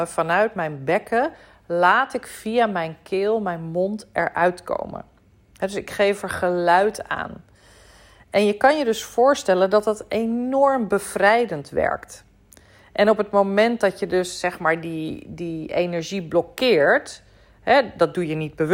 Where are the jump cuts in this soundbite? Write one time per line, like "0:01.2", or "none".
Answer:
none